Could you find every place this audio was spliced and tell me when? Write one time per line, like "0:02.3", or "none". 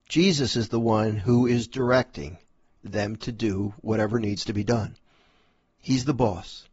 none